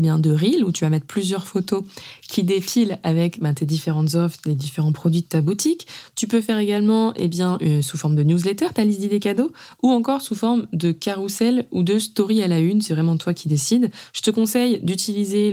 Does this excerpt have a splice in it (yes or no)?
no